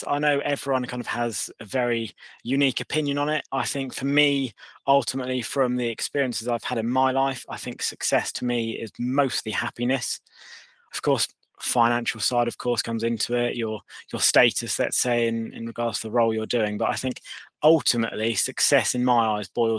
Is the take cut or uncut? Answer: cut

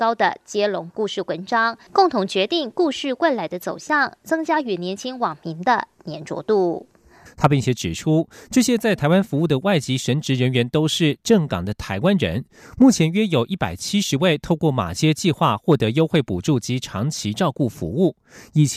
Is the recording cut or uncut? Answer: cut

